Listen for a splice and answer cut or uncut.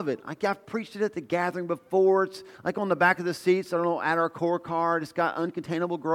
uncut